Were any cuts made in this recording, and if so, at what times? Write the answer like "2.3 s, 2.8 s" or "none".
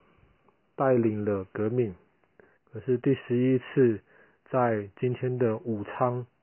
2.6 s